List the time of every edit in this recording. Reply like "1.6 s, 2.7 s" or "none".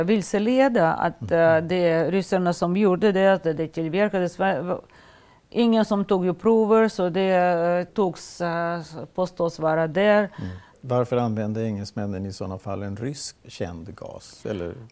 7.9 s, 10.7 s, 13.4 s